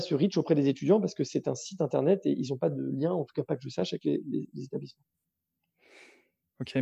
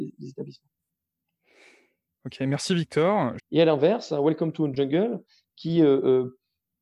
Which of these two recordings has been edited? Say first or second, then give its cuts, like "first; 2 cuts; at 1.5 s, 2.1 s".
second; 1 cut; at 3.4 s